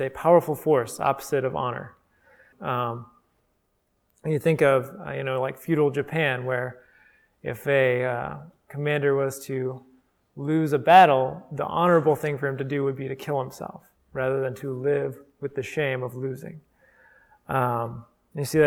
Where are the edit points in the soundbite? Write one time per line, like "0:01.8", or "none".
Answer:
0:02.5